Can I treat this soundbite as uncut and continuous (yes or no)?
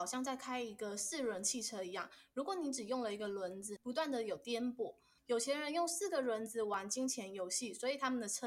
no